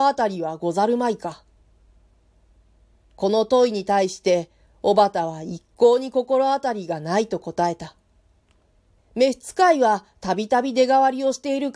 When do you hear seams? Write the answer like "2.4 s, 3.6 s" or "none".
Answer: 9.0 s